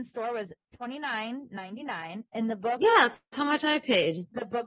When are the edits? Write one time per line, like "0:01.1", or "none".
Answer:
none